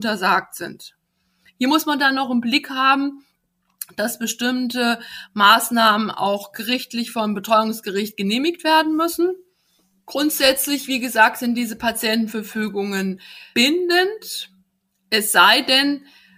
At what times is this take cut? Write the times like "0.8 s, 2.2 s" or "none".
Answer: none

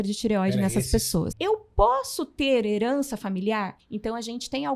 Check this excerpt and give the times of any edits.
1.3 s, 3.8 s

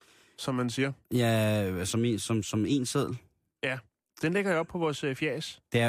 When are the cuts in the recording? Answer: none

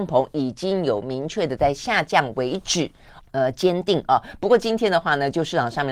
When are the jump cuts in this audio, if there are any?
3.2 s

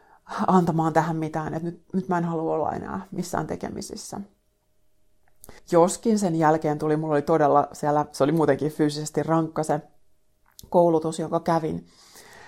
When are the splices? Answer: 5.6 s

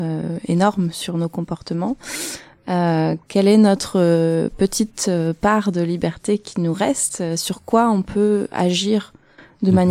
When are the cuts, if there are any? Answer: 3.3 s

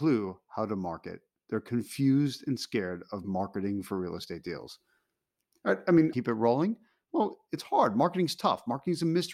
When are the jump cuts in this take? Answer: 6.1 s

